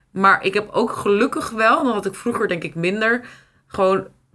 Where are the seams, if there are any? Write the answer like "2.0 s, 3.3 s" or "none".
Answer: none